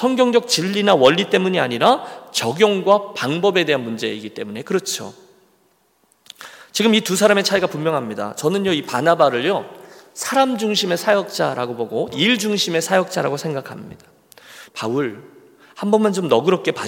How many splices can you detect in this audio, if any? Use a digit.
2